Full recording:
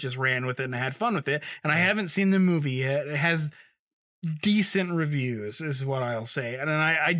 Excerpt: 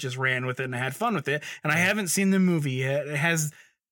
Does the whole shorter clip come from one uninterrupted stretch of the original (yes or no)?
yes